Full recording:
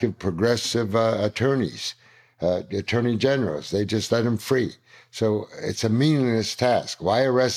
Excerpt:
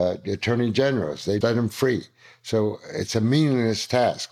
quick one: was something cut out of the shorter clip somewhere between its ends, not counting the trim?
yes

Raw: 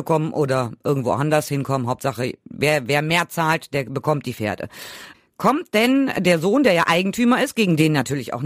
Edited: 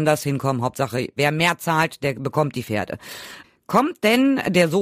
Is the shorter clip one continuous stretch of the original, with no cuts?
no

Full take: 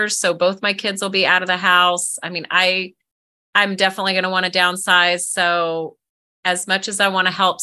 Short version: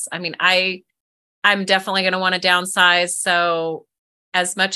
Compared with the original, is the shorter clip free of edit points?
yes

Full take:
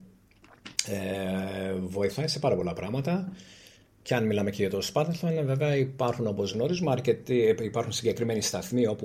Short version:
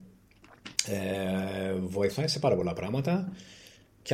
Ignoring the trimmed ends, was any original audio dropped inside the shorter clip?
no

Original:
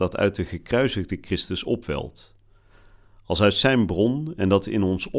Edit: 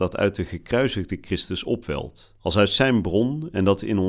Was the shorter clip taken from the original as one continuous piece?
no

